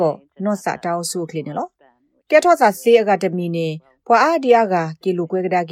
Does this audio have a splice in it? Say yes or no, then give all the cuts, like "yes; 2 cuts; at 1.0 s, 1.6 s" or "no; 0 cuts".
no; 0 cuts